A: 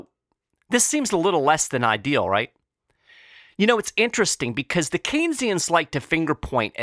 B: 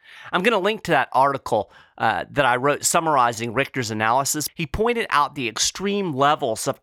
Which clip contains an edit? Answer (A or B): B